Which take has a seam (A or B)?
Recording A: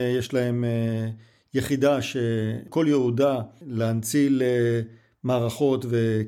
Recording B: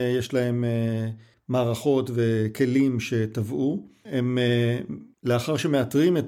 B